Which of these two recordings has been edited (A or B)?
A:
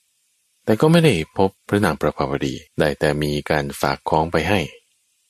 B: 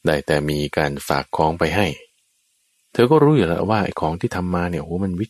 A